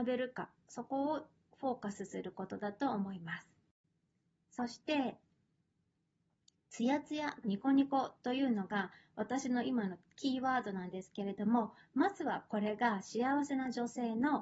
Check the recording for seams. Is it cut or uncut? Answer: cut